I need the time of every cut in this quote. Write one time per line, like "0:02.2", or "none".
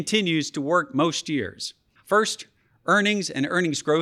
0:02.0